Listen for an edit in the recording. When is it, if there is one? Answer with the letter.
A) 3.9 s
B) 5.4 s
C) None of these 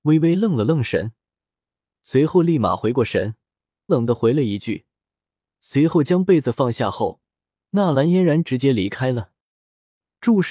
A